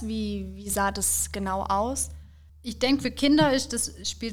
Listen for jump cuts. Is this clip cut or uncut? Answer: cut